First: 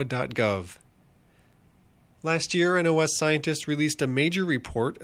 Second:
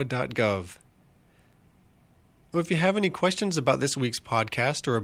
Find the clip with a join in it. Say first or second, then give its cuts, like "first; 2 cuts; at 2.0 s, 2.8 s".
first; 1 cut; at 2.2 s